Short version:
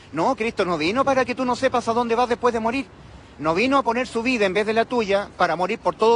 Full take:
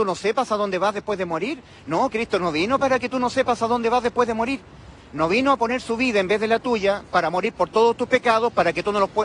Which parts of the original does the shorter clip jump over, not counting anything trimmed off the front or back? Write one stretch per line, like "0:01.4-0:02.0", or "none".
none